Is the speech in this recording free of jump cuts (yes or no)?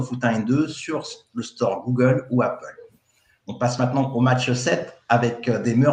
yes